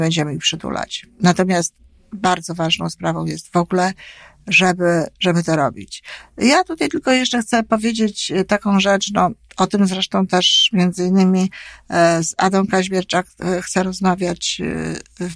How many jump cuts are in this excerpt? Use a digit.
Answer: 0